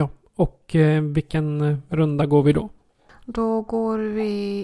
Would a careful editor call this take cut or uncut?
uncut